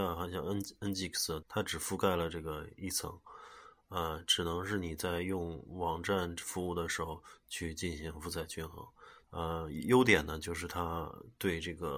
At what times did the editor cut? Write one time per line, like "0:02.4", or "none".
0:01.4
0:09.2